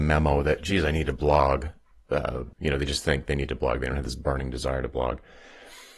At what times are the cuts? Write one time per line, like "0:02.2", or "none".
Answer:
0:02.5